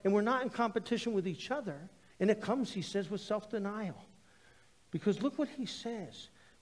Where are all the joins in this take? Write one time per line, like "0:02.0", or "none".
0:02.1